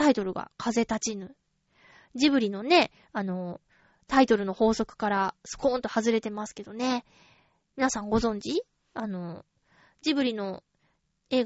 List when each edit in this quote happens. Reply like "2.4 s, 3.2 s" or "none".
none